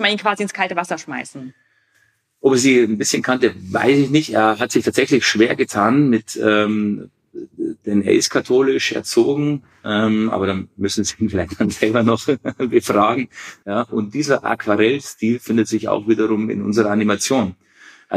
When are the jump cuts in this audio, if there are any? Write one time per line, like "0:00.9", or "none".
0:13.6